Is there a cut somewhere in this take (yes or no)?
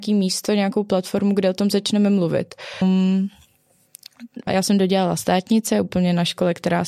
yes